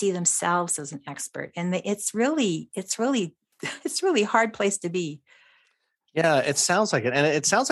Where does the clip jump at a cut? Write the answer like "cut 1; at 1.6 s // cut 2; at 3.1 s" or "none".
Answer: none